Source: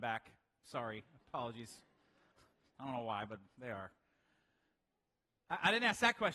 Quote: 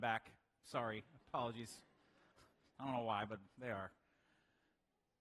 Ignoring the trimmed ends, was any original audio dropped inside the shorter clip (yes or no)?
no